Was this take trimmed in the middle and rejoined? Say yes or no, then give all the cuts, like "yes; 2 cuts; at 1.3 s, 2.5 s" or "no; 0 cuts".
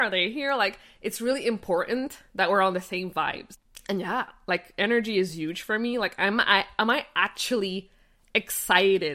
no; 0 cuts